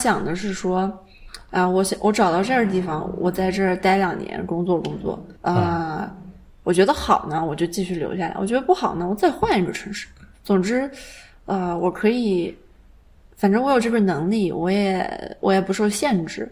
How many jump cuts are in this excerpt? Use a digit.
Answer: 1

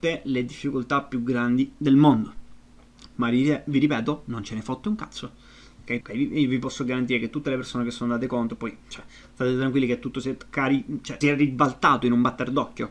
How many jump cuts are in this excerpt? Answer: 2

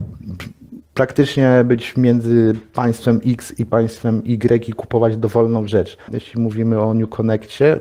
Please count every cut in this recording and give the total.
1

